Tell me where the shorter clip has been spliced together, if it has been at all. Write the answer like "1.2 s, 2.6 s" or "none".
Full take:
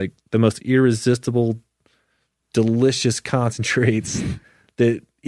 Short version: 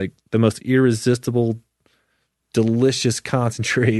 none